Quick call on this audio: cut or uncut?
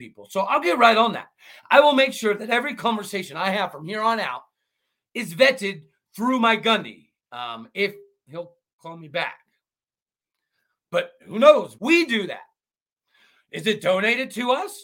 cut